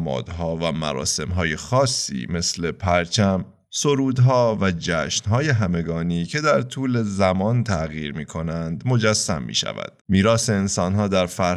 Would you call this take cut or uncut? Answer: cut